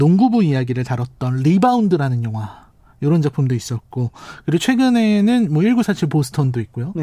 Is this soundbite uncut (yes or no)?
yes